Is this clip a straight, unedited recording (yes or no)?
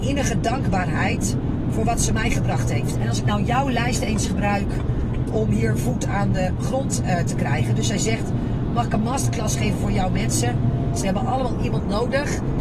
no